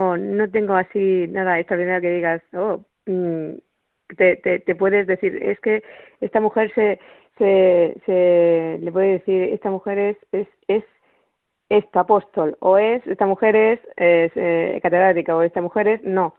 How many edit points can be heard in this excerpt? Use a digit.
0